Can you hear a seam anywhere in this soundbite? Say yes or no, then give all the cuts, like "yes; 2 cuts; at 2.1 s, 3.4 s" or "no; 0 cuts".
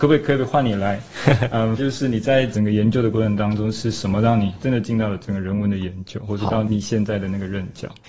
yes; 1 cut; at 1.8 s